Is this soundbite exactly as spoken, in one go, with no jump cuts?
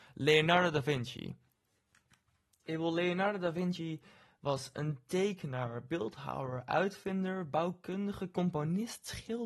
yes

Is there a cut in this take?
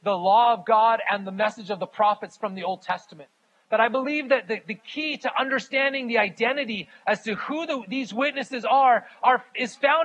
no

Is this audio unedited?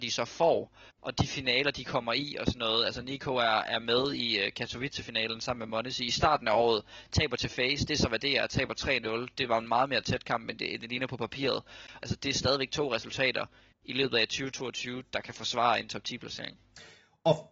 no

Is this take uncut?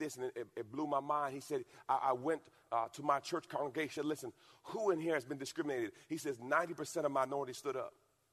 no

